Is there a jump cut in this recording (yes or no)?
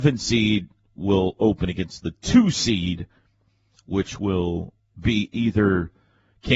no